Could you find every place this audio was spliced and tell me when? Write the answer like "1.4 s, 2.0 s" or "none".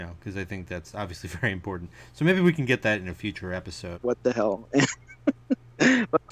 3.9 s